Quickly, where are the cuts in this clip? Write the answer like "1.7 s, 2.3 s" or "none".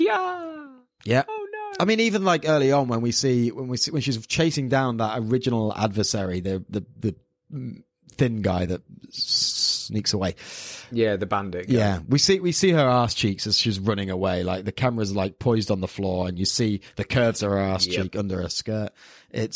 none